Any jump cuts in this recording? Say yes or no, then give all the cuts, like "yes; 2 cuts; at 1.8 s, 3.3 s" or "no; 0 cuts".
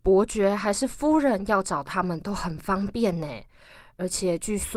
no; 0 cuts